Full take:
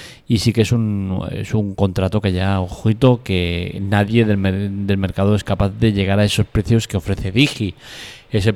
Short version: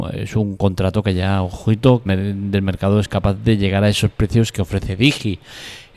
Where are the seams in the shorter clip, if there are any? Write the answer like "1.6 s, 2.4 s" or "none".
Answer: 2.1 s